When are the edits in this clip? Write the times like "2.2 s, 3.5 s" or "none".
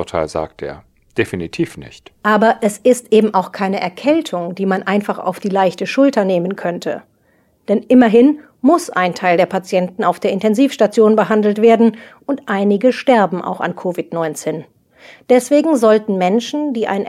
none